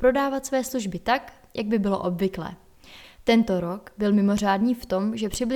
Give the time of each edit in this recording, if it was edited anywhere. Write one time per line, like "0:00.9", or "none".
0:03.0